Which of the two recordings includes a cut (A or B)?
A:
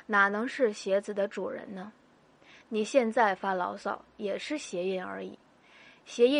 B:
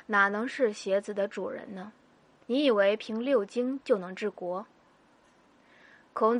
B